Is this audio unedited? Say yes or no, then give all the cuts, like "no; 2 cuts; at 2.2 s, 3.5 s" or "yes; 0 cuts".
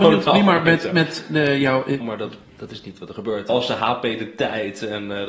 no; 2 cuts; at 2.0 s, 3.5 s